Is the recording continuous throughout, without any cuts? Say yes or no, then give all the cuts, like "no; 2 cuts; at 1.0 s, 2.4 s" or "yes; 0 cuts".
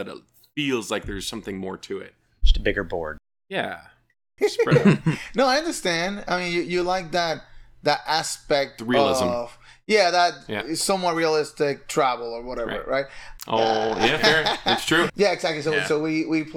no; 2 cuts; at 13.4 s, 15.1 s